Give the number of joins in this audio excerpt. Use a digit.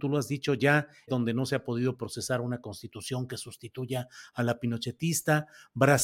1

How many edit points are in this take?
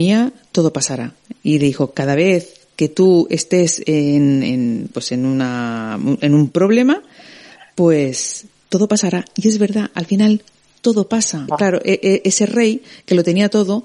1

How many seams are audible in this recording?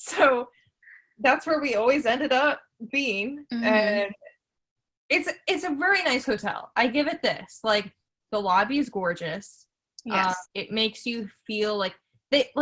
1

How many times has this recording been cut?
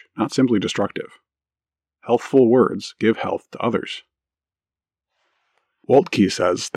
0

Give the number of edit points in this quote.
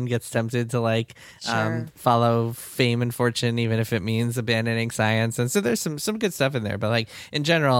0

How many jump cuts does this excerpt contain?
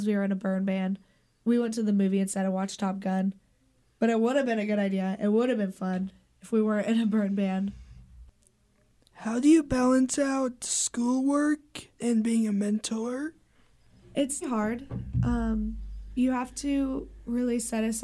2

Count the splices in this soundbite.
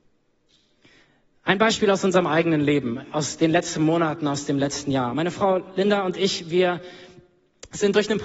0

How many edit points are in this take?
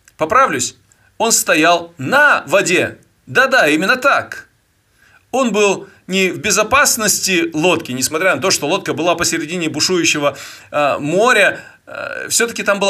1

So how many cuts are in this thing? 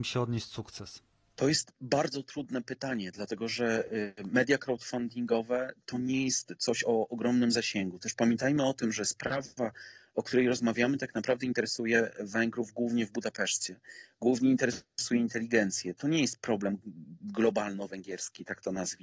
0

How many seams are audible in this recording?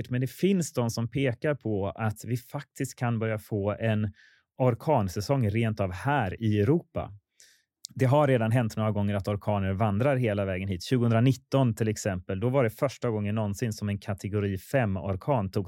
0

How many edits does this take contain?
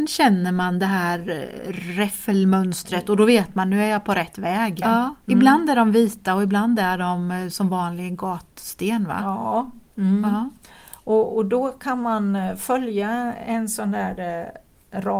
1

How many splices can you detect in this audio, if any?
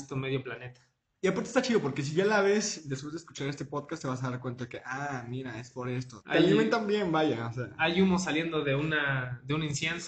1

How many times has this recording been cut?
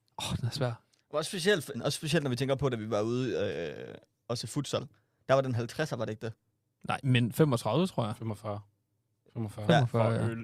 2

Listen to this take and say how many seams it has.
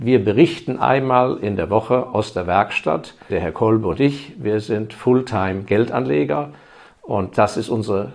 1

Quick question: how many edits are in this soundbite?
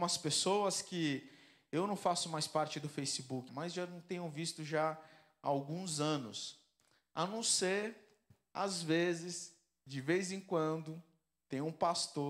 1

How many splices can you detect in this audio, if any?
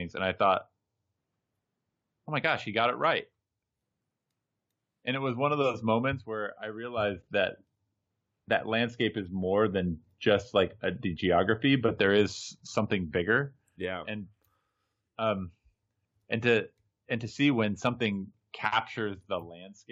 0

